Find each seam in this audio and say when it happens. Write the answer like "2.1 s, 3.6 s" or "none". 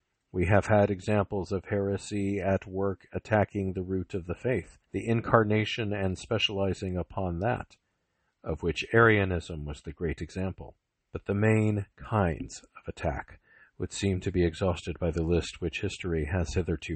4.8 s, 11.1 s